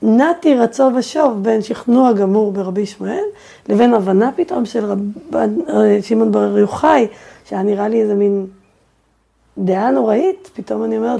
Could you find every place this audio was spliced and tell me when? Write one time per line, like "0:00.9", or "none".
none